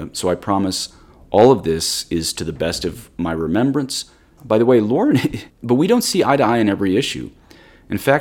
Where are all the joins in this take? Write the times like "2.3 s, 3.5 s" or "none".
4.4 s, 5.5 s